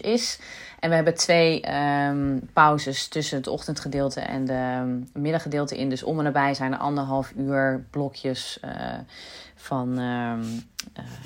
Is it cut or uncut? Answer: uncut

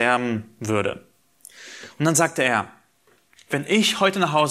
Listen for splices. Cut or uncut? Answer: uncut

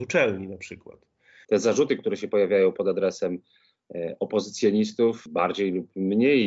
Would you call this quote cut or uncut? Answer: cut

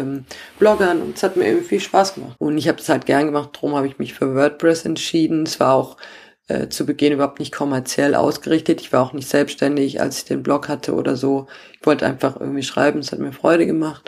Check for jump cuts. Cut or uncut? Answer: cut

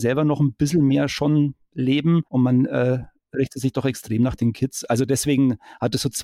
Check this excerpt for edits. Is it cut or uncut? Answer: cut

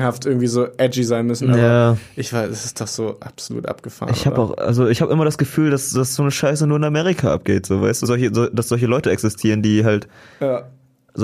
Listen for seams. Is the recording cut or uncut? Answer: cut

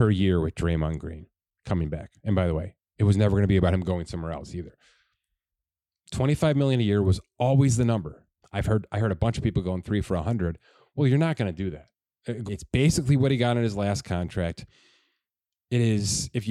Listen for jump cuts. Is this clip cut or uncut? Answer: cut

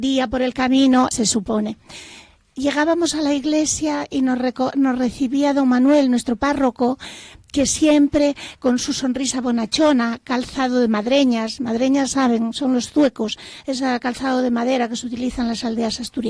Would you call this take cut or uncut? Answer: cut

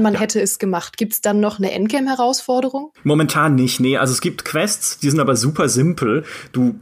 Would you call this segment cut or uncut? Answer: uncut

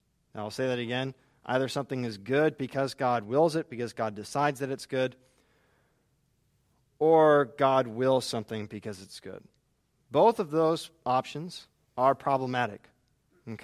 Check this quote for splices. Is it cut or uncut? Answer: uncut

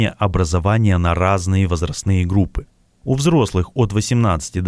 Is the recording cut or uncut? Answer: uncut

